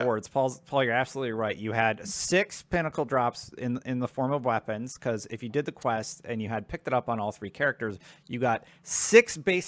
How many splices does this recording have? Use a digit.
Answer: 0